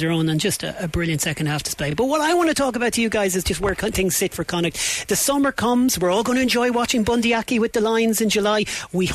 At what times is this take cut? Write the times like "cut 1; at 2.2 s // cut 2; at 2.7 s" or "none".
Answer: none